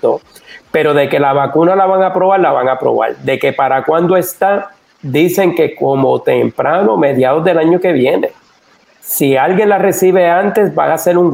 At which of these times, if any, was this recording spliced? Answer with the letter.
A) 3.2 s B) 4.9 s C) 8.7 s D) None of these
D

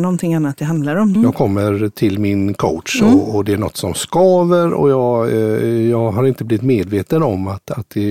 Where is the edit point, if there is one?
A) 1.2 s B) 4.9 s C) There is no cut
A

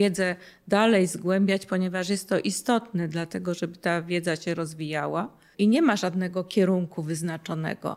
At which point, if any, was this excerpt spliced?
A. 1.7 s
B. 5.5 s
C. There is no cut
B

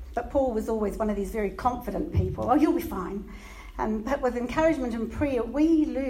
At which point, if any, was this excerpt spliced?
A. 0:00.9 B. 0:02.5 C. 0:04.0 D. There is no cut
D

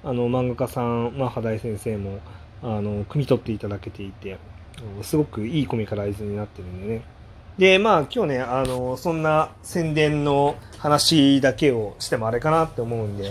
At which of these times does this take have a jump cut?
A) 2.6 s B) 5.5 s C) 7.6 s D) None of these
C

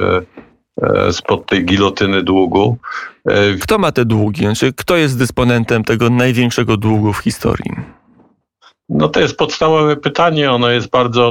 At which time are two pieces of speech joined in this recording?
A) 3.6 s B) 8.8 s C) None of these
A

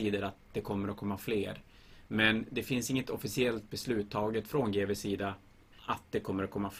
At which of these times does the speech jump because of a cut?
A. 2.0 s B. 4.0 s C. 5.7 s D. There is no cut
C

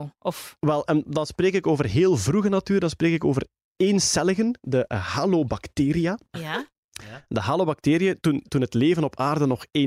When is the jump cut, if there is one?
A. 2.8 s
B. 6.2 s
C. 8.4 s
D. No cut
C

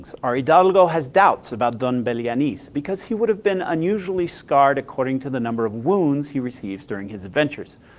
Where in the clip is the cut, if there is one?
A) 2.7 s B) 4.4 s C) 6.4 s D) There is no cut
A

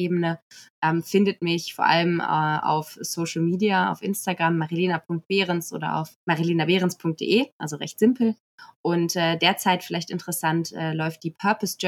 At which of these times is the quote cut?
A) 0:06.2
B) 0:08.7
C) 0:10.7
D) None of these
A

